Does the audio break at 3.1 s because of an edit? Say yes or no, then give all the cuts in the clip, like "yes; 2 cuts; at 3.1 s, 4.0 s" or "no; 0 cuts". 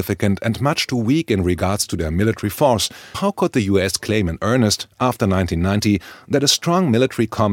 yes; 1 cut; at 3.1 s